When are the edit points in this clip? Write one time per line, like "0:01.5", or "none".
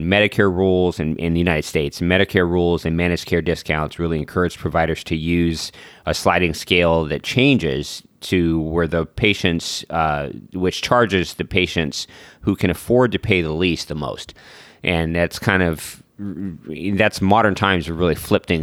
none